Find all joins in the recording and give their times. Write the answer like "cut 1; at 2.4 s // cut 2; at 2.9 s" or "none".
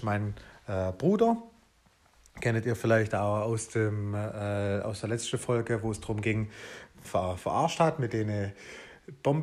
cut 1; at 7.0 s